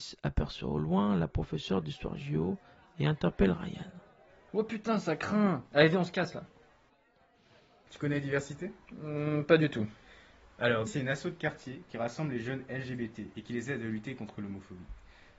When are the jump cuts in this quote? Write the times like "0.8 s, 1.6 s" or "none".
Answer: 4.5 s, 7.9 s, 10.9 s